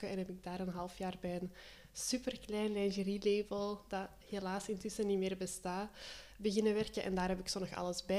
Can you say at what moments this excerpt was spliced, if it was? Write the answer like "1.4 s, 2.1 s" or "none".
none